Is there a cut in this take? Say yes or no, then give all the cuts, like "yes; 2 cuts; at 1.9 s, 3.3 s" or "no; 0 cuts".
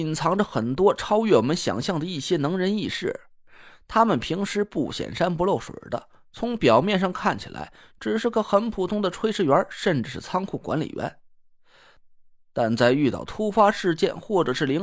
no; 0 cuts